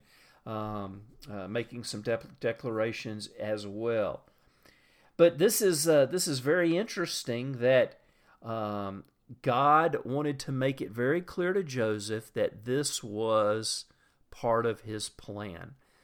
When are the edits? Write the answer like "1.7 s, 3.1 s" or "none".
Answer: none